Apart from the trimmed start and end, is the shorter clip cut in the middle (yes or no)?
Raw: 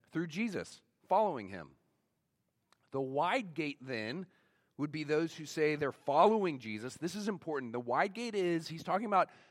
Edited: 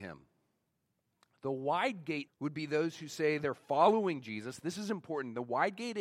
yes